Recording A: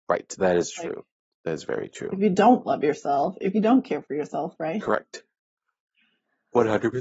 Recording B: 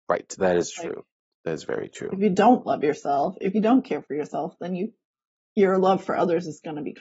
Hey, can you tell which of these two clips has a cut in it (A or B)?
A